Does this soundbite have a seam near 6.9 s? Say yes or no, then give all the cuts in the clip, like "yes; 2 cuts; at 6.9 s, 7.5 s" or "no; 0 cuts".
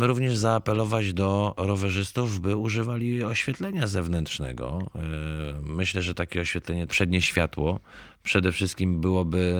yes; 1 cut; at 6.9 s